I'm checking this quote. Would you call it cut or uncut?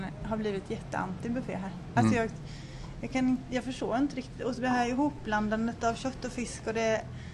uncut